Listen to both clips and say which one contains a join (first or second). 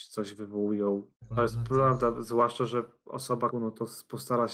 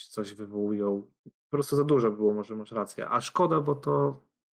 first